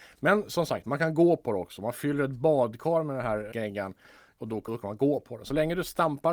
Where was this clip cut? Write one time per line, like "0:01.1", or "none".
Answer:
0:03.5
0:04.7